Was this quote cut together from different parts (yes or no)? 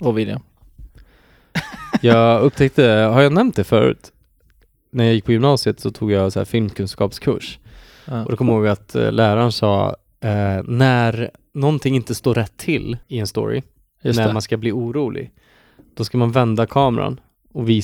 yes